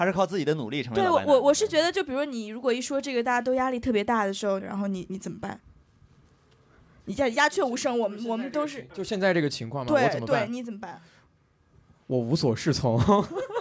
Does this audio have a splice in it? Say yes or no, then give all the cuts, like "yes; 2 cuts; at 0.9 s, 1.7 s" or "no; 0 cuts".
yes; 1 cut; at 4.6 s